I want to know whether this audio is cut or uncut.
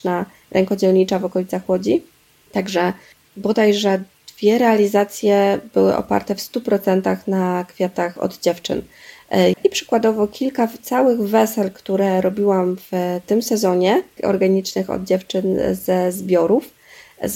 cut